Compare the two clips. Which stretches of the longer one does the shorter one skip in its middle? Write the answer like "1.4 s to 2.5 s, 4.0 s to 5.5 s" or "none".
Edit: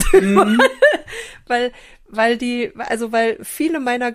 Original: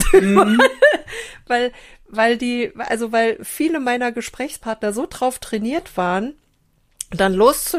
none